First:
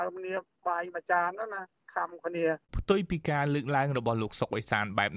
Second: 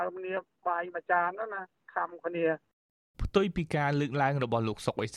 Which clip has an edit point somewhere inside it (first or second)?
first